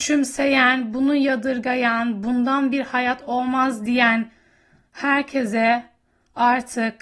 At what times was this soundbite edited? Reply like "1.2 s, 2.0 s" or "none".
none